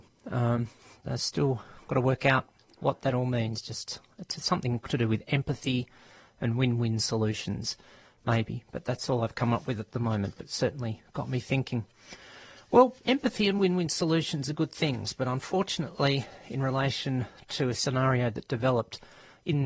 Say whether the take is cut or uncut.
uncut